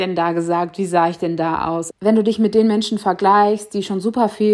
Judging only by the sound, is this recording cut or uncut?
cut